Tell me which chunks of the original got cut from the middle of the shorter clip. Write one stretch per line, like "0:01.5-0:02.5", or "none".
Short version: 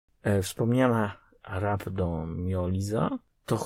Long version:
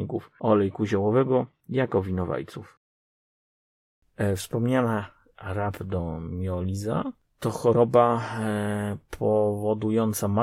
none